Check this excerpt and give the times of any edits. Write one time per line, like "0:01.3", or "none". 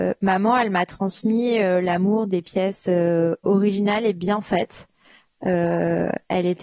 none